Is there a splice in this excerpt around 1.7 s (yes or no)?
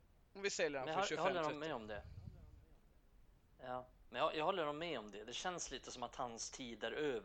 no